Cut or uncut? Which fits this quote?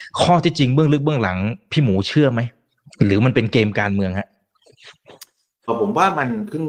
cut